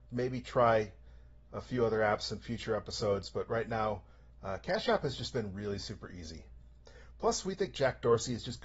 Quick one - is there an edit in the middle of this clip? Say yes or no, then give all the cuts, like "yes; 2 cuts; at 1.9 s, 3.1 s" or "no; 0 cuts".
no; 0 cuts